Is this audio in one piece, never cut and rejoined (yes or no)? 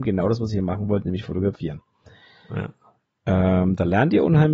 yes